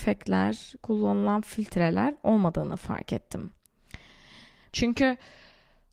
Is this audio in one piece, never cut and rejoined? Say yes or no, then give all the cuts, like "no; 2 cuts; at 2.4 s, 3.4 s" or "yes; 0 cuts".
no; 1 cut; at 4.7 s